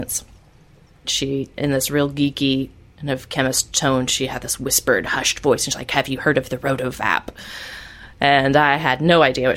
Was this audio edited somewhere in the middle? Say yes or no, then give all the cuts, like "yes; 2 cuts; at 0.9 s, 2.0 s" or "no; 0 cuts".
no; 0 cuts